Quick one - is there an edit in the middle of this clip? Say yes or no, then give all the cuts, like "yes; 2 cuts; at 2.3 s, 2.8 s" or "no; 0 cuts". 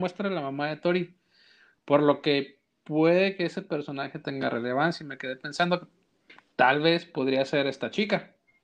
no; 0 cuts